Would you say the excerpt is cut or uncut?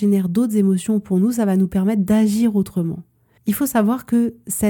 cut